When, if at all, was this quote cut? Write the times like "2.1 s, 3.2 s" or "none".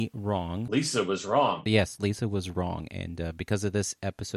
none